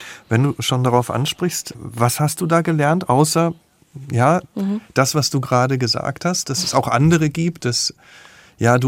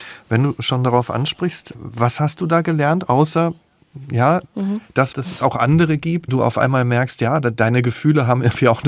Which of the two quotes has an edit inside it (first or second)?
second